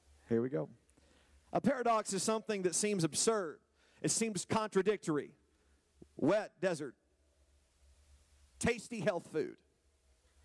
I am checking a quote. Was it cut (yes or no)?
no